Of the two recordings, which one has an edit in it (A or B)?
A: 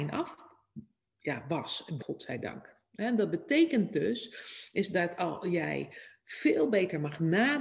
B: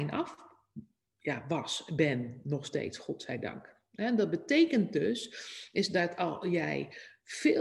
A